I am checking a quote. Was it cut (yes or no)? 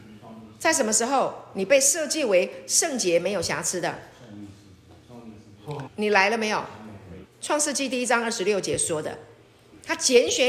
yes